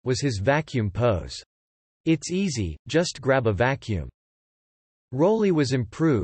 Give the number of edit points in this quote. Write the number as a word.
two